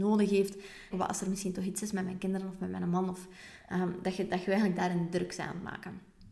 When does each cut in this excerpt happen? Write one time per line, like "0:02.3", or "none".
0:00.9